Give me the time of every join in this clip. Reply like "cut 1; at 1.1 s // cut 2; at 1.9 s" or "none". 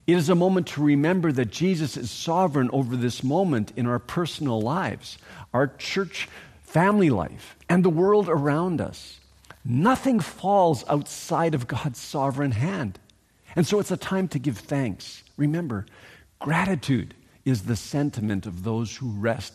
none